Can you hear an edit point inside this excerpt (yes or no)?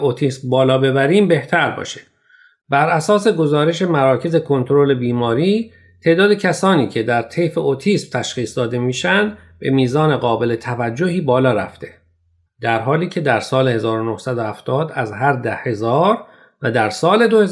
yes